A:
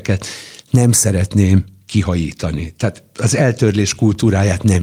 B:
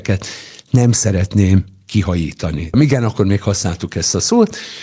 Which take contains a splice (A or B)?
B